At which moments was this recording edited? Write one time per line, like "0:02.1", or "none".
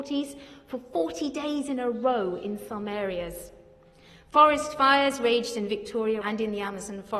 0:06.2